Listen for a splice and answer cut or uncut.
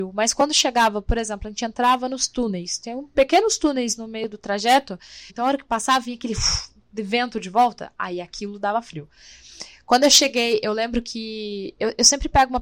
cut